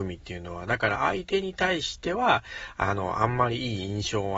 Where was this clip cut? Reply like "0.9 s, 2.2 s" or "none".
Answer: none